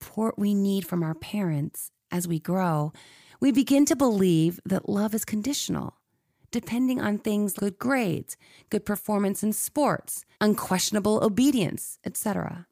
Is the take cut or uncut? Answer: cut